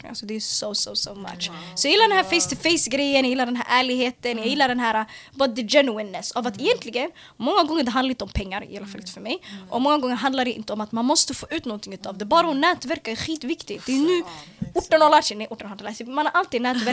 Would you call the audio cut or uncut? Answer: uncut